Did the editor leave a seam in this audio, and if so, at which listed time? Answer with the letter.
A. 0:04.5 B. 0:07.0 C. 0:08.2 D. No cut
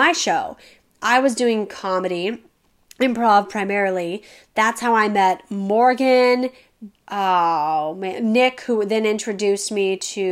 B